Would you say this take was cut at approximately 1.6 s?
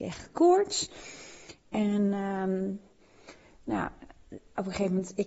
no; 0 cuts

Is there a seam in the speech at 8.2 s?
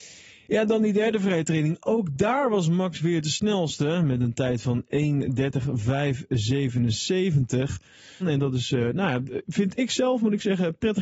yes; 1 cut; at 8.2 s

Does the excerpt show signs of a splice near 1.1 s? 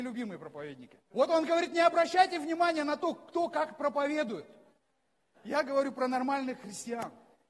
yes; 2 cuts; at 1.1 s, 5.3 s

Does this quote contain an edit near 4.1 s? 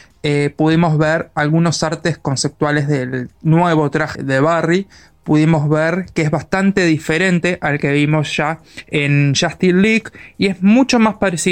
yes; 1 cut; at 4.1 s

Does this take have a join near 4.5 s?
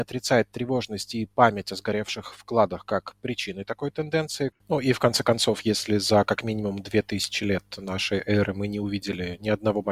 yes; 1 cut; at 4.5 s

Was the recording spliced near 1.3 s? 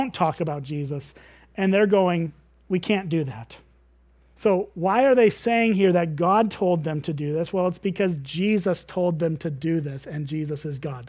no; 1 cut; at 4.3 s

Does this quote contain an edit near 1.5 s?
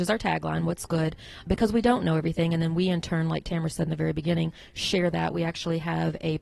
yes; 1 cut; at 1.5 s

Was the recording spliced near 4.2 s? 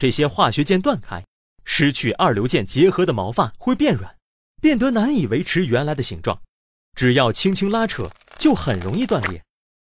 no; 0 cuts

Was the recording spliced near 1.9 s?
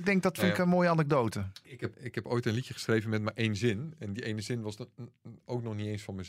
yes; 1 cut; at 1.9 s

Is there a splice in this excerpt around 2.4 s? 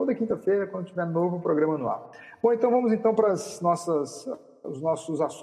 no; 0 cuts

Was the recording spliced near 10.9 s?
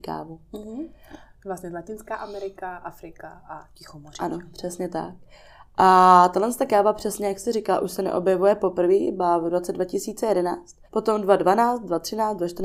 yes; 1 cut; at 10.9 s

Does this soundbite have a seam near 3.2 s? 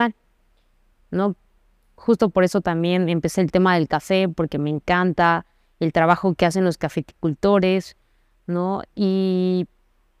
no; 2 cuts; at 1.9 s, 8.9 s

